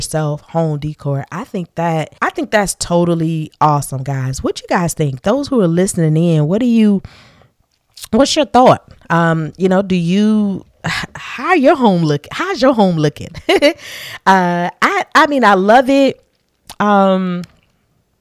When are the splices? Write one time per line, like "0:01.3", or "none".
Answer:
0:02.2

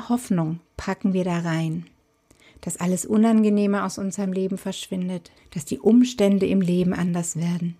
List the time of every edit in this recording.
0:05.4

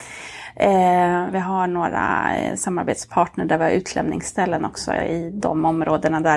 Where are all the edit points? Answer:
0:01.3

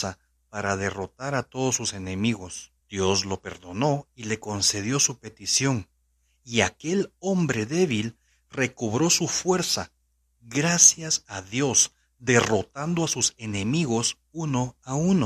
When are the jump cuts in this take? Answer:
0:02.8

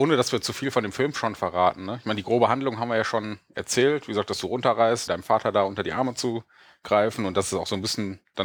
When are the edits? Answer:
0:05.1

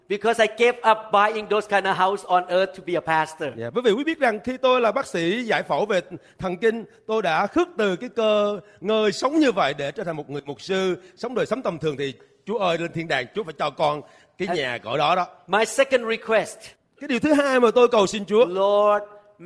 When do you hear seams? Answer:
none

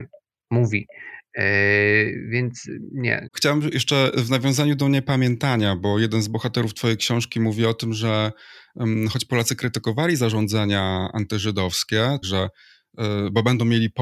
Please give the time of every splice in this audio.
0:03.3
0:12.2

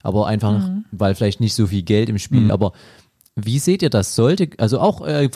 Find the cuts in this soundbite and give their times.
0:02.5

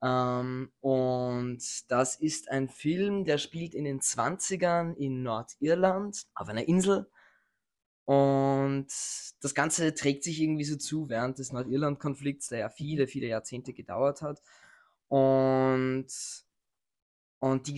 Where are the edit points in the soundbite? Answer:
0:06.3

